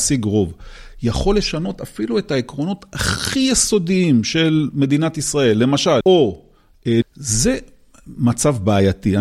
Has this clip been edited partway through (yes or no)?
yes